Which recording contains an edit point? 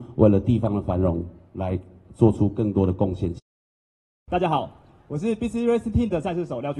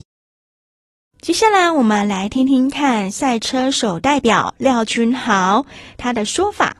first; 1 cut; at 4.1 s

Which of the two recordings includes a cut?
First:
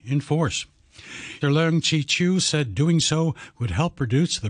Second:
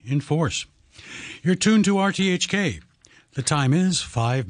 first; 1 cut; at 1.4 s

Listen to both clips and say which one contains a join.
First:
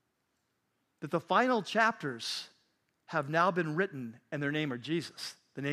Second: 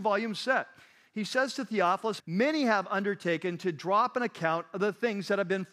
second; 1 cut; at 2.2 s

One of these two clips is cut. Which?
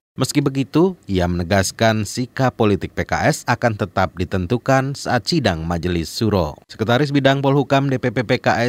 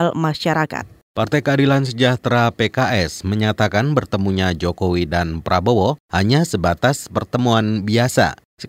first; 1 cut; at 6.6 s

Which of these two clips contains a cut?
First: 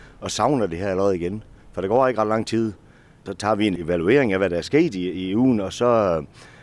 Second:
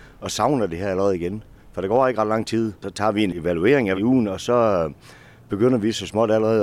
second; 2 cuts; at 2.8 s, 3.9 s

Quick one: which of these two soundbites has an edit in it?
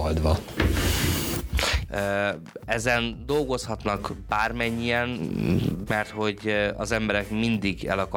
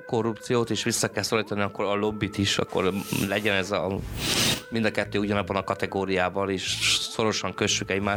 first; 2 cuts; at 1.9 s, 5.9 s

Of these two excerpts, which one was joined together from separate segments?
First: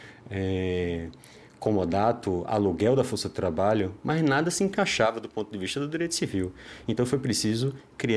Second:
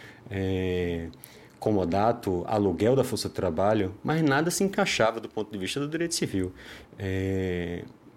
second; 1 cut; at 6.8 s

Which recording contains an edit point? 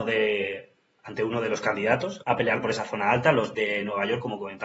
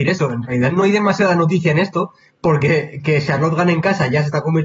first; 2 cuts; at 2.2 s, 3.5 s

